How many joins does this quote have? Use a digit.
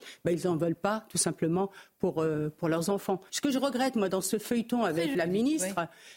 2